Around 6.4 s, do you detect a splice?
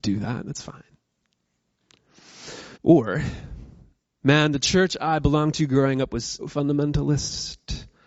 yes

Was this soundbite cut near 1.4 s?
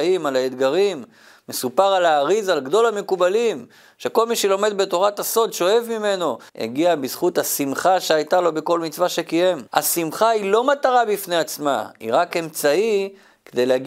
no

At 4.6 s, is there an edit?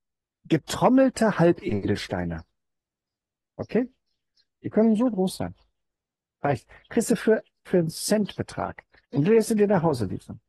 no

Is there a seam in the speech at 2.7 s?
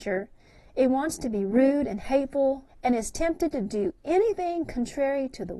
yes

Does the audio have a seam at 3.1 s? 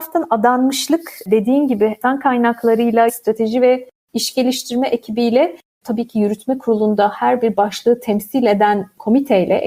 yes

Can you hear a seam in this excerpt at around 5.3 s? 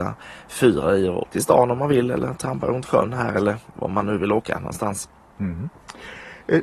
no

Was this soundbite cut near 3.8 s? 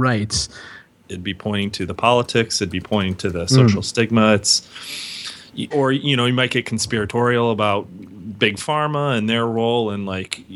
no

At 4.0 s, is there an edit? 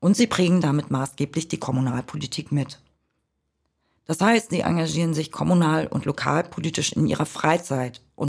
yes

